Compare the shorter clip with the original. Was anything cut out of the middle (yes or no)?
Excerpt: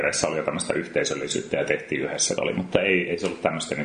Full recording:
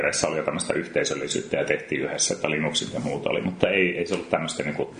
yes